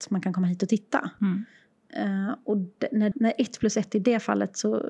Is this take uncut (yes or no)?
no